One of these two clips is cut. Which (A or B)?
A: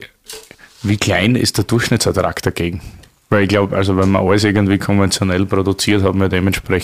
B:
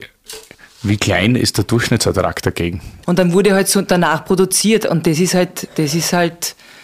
B